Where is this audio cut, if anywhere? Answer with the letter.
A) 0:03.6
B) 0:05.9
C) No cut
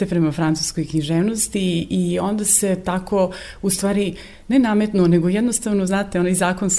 C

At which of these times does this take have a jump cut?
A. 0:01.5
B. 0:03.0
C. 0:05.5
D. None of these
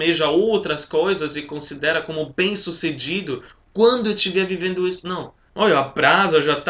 C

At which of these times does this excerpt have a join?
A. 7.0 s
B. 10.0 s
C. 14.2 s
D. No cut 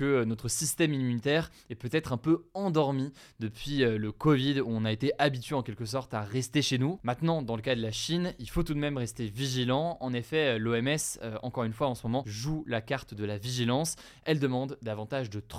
A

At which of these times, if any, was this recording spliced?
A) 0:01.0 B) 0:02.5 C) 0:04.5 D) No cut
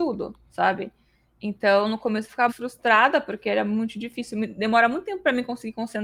B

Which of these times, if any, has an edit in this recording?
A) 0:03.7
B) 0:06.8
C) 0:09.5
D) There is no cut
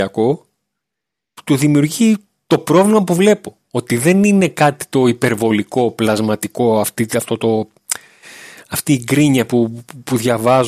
D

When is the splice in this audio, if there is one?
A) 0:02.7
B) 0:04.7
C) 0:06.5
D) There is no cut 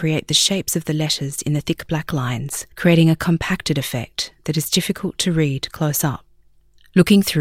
A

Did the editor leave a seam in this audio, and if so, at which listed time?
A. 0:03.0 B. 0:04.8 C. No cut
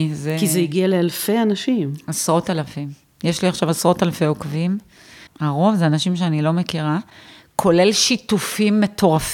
C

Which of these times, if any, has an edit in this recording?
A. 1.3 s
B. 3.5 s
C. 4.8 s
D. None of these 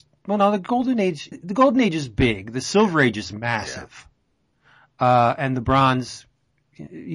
A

